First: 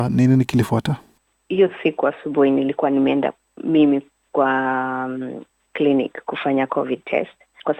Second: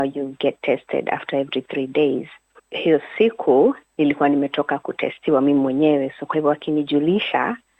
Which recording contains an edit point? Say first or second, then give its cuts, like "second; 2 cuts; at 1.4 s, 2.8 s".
second; 1 cut; at 2.6 s